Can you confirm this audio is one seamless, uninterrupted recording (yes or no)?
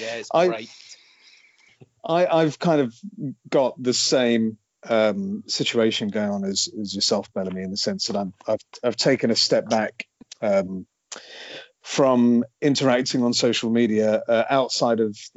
yes